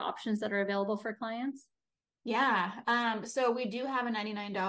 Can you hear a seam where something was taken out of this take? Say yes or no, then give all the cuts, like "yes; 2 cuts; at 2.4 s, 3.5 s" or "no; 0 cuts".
no; 0 cuts